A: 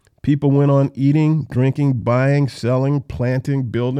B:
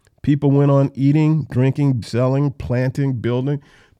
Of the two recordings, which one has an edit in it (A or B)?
B